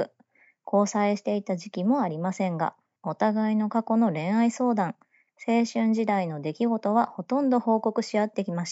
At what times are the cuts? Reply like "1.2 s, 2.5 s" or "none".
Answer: 3.0 s, 5.3 s